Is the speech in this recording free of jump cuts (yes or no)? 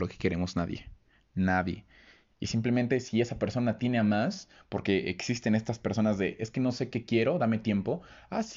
yes